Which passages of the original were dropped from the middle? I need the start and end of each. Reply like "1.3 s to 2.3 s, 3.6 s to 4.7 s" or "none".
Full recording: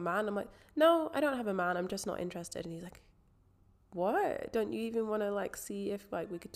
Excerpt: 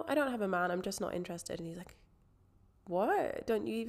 none